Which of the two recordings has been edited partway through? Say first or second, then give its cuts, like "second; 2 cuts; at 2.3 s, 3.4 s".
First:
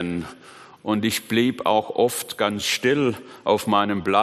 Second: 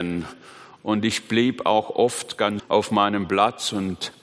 second; 1 cut; at 2.6 s